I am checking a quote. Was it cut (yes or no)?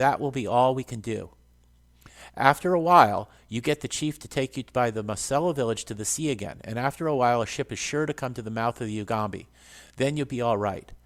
no